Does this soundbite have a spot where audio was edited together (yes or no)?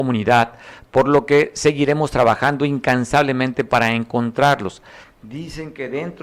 yes